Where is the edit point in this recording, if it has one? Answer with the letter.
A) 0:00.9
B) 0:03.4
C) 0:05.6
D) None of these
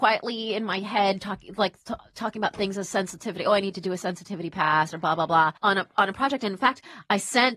C